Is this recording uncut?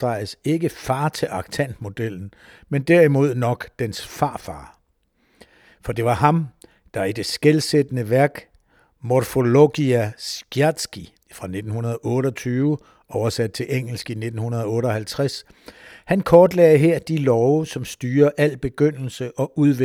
no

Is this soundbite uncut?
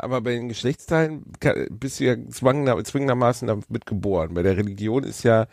yes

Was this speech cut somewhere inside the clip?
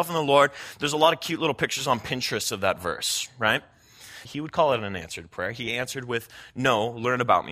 yes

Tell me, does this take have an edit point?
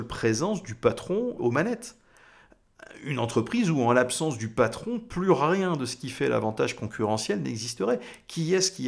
yes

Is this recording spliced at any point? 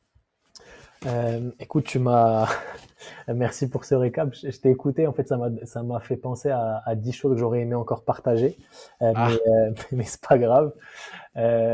no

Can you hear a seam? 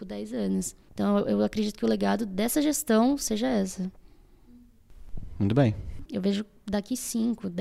yes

